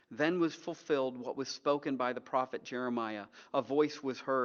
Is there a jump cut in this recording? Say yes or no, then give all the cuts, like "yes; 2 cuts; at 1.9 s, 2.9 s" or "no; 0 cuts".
no; 0 cuts